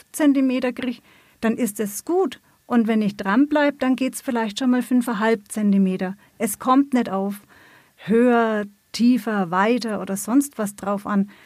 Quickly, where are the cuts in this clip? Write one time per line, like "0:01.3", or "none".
none